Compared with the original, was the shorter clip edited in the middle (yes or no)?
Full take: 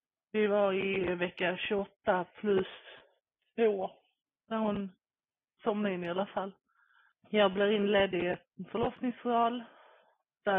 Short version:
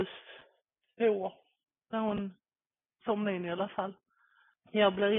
no